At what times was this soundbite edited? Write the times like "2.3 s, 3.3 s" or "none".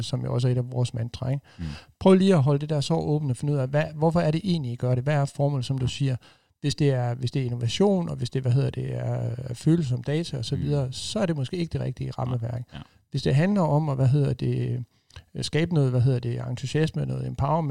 none